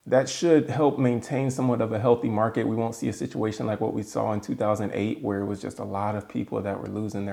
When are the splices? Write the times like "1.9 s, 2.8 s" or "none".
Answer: none

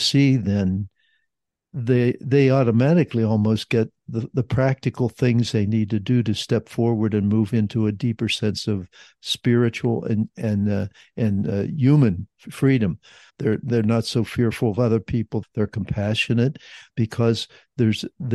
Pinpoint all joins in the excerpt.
13.3 s, 15.4 s

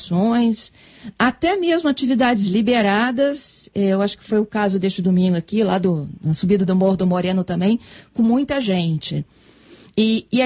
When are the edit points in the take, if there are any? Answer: none

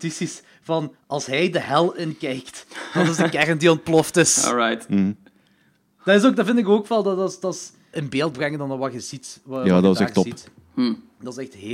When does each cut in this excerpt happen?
7.9 s

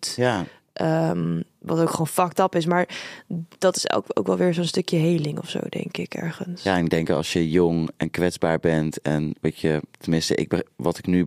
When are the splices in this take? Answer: none

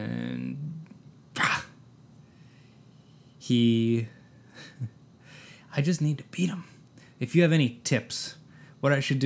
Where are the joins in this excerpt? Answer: none

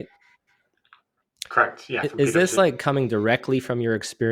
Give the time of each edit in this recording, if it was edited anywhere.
none

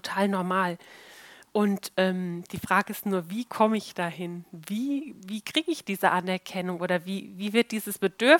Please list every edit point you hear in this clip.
none

